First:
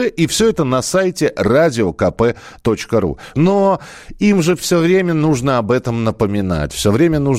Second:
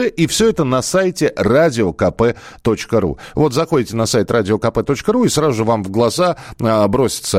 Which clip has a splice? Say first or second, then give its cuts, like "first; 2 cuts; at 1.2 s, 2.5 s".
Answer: first; 1 cut; at 3.3 s